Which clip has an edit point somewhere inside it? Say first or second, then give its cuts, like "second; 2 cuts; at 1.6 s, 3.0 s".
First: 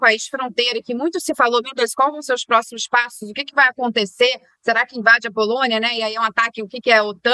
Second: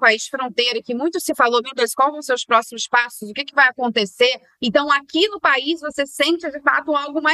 second; 1 cut; at 4.6 s